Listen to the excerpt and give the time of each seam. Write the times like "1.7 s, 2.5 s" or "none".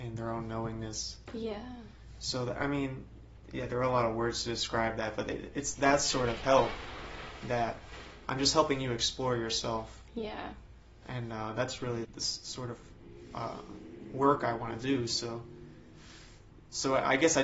12.0 s